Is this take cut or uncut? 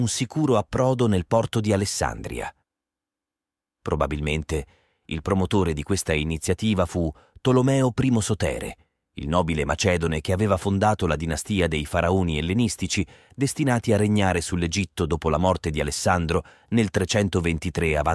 uncut